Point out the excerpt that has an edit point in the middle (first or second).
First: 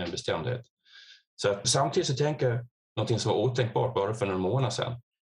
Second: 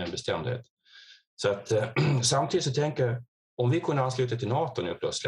first